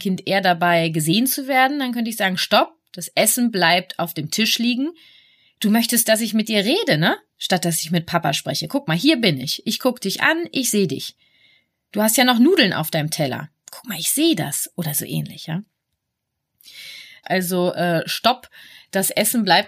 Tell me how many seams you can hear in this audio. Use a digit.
1